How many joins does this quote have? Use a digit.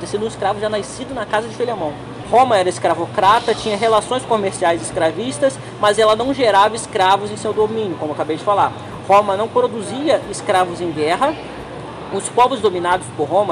1